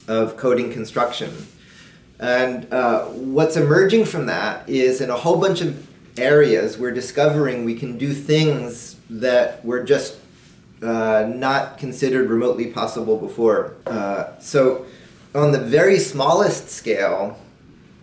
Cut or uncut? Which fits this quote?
cut